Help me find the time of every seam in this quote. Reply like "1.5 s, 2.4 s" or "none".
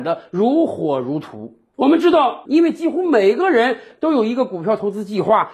2.4 s

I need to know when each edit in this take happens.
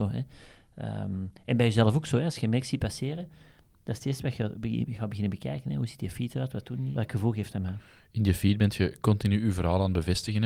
6.9 s

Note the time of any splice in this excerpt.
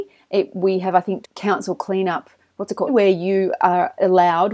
1.2 s, 2.9 s

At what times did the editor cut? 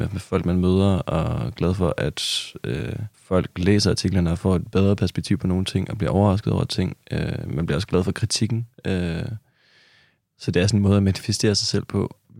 3.1 s

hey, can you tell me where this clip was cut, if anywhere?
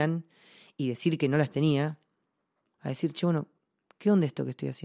2.7 s

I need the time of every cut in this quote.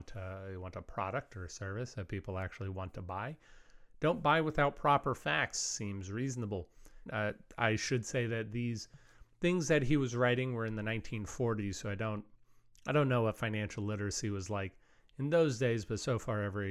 7.1 s

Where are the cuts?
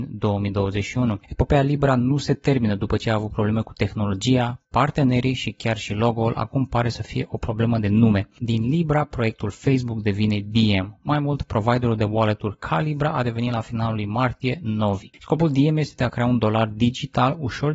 none

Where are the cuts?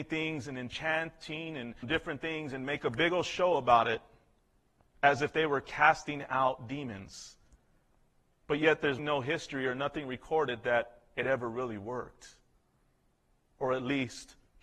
1.8 s, 9.0 s

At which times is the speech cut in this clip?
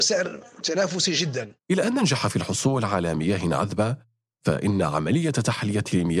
1.6 s

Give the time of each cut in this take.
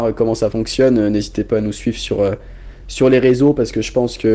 none

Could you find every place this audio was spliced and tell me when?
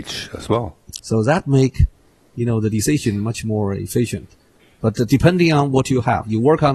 1.0 s

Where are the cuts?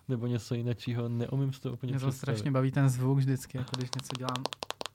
none

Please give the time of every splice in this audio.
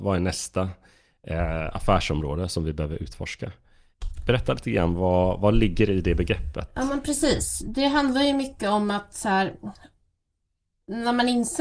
none

